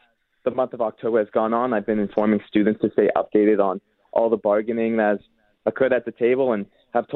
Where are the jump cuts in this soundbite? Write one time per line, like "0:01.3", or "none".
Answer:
none